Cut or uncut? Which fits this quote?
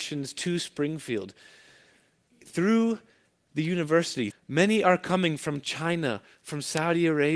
cut